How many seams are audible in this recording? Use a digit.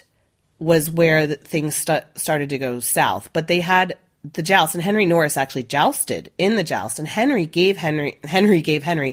0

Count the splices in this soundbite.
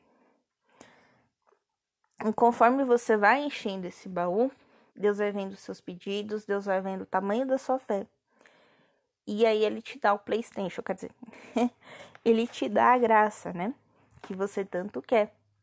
1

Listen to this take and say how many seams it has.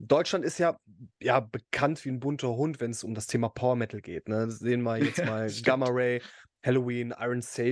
0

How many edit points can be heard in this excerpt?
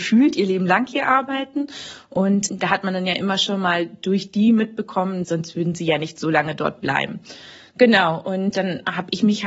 1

